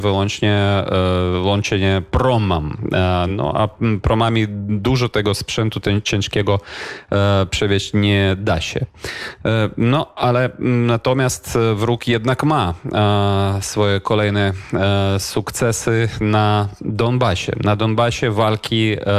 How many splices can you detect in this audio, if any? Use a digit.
0